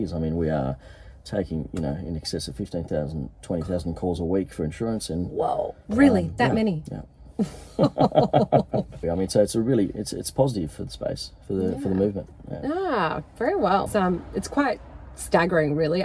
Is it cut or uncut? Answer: cut